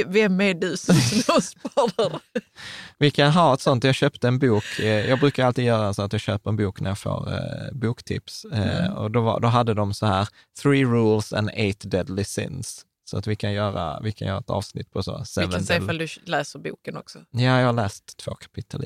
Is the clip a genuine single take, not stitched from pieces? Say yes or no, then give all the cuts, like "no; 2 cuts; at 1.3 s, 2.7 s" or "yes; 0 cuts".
yes; 0 cuts